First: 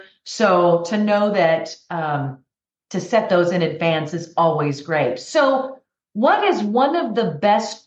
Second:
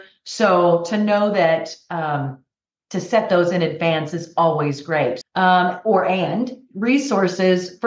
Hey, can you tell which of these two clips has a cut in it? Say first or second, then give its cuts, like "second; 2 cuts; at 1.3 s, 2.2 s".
second; 1 cut; at 5.2 s